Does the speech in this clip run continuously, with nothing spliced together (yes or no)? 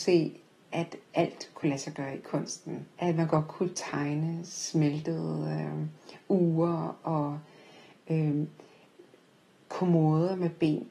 no